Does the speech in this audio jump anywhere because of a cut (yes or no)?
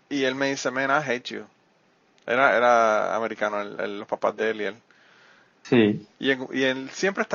yes